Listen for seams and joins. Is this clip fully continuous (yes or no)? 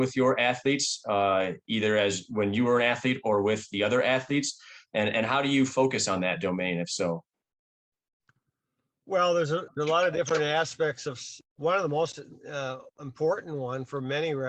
no